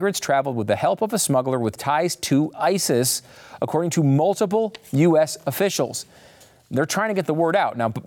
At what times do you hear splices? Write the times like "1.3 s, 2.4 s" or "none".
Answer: none